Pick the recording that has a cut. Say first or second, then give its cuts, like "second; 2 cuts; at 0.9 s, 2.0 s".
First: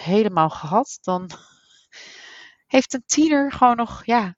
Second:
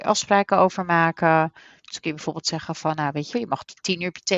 second; 1 cut; at 3.3 s